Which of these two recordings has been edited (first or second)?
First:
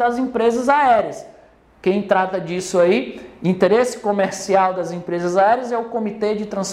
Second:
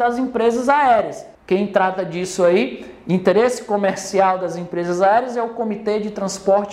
second